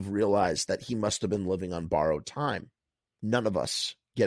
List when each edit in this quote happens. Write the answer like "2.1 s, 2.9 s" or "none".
3.2 s